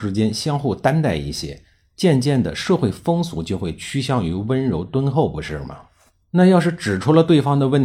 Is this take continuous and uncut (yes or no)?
yes